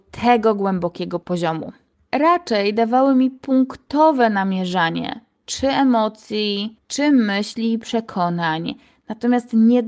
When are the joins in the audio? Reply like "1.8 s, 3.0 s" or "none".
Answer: 6.8 s